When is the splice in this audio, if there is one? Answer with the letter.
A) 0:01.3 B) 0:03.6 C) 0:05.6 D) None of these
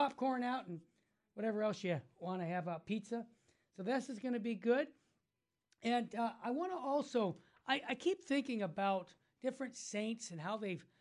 D